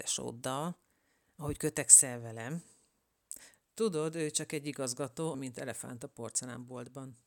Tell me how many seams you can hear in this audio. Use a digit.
2